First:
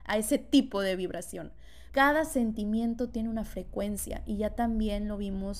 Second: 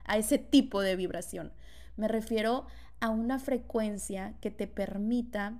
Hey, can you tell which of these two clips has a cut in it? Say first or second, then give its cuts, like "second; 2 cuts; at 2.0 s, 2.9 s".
first; 1 cut; at 1.9 s